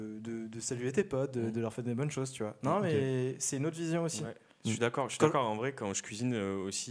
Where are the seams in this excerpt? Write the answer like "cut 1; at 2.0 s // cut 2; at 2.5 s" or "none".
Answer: none